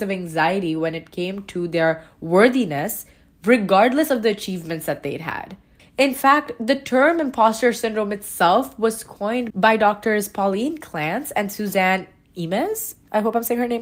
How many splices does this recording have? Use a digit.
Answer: 2